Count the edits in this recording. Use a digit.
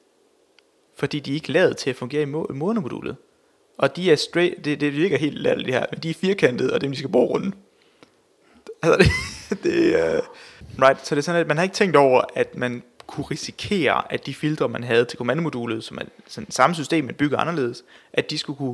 0